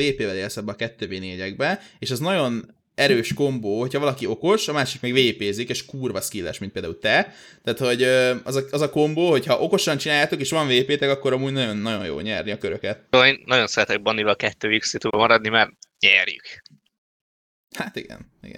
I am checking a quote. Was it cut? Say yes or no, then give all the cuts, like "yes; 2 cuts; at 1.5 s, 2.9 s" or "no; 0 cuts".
yes; 1 cut; at 13.1 s